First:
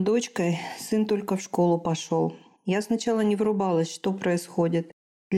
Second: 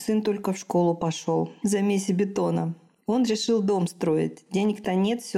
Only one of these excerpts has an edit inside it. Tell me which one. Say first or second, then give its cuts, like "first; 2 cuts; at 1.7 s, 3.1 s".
second; 1 cut; at 1.6 s